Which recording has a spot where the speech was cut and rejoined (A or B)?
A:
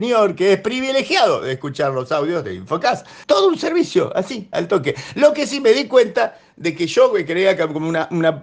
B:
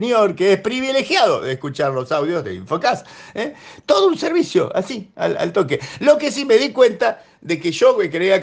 A